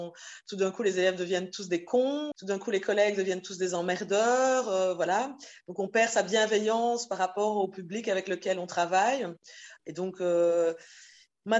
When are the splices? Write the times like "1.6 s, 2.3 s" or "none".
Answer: 2.3 s, 9.8 s